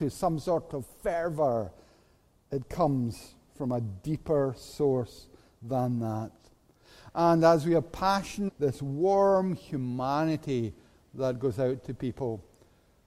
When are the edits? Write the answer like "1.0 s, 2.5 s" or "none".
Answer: 8.5 s